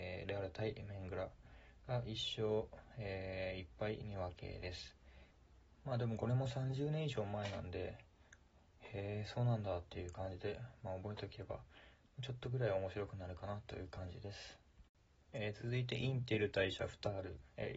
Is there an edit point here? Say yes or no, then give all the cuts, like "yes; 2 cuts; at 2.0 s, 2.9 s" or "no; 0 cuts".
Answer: no; 0 cuts